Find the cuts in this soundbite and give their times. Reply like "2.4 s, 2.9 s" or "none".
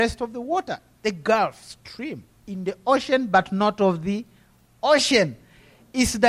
none